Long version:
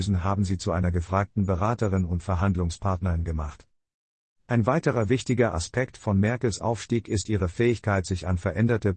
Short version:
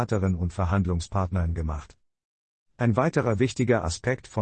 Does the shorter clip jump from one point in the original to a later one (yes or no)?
no